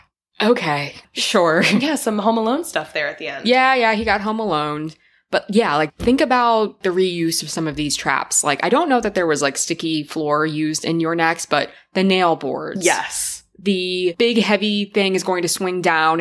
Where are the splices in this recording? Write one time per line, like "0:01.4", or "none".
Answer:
none